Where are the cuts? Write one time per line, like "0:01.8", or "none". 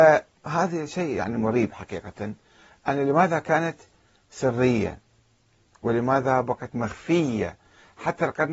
none